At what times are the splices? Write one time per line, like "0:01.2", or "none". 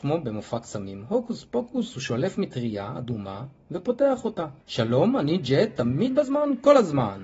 0:04.6